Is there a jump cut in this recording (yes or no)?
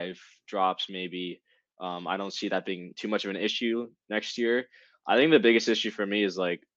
no